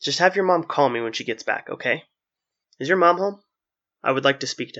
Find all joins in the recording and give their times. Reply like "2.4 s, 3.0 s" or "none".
2.6 s